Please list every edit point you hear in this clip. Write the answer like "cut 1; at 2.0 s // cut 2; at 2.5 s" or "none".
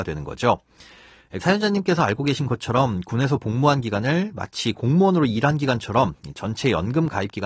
cut 1; at 1.4 s